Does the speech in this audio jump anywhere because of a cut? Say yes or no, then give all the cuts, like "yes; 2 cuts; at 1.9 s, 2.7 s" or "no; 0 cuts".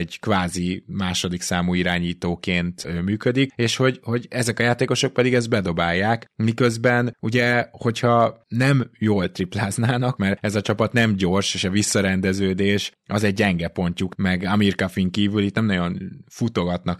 yes; 2 cuts; at 10.2 s, 14.1 s